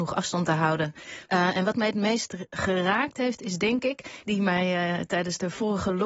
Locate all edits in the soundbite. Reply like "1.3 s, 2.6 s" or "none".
1.3 s, 4.2 s